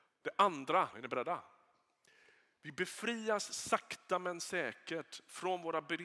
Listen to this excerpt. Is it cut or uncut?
cut